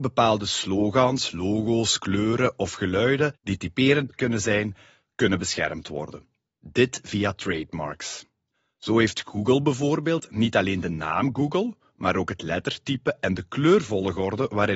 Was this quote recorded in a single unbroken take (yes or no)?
yes